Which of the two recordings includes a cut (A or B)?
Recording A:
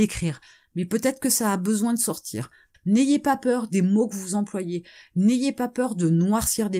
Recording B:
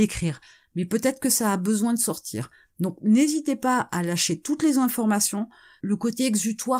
A